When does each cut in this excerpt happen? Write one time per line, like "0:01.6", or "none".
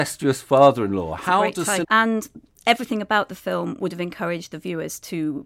0:01.8